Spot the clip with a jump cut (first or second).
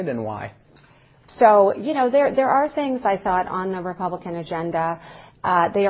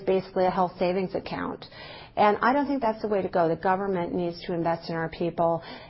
first